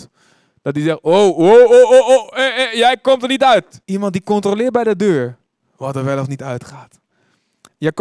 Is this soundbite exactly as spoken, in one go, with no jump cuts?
no; 1 cut; at 3.8 s

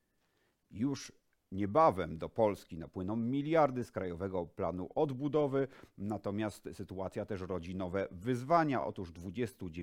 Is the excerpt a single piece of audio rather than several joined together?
yes; 0 cuts

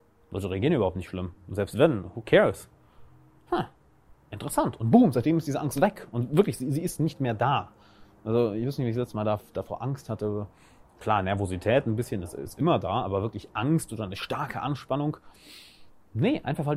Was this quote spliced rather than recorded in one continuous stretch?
no; 0 cuts

